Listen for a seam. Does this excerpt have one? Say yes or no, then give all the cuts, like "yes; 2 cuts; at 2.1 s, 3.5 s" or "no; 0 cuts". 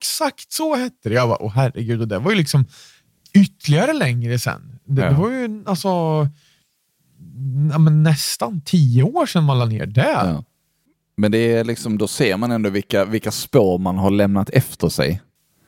no; 0 cuts